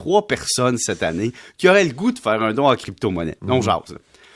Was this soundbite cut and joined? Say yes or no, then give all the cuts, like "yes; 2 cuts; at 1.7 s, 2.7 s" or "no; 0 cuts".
yes; 1 cut; at 3.4 s